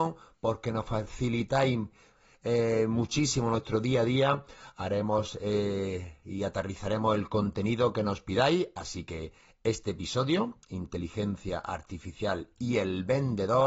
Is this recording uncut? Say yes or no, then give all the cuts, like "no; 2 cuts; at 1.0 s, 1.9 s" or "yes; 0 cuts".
yes; 0 cuts